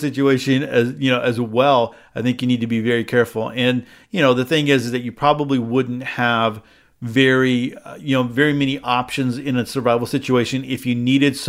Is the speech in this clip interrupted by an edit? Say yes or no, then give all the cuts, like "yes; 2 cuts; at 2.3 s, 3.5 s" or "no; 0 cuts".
no; 0 cuts